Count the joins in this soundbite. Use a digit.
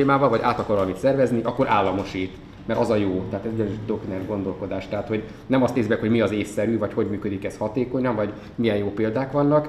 0